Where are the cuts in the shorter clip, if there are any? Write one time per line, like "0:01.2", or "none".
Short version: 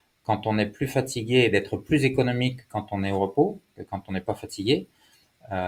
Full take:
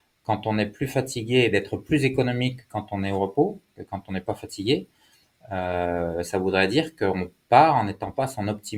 none